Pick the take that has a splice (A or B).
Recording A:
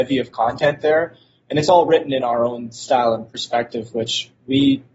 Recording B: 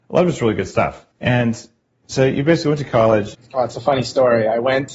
B